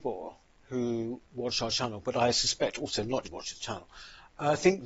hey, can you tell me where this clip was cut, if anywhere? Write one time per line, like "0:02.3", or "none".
0:03.2